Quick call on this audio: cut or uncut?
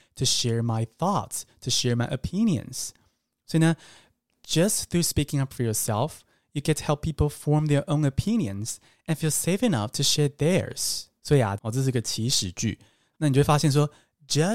cut